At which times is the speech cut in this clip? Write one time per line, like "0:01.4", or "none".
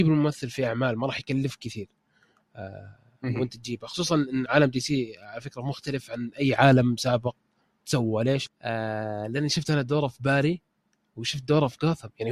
0:04.5
0:08.5